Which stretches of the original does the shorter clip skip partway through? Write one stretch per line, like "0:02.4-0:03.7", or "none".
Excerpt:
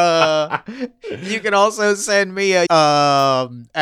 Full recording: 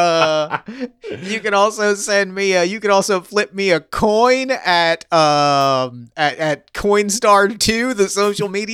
0:02.7-0:05.1